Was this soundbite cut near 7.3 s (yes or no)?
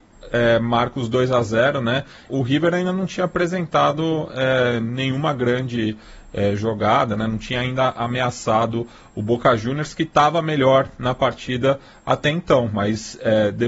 no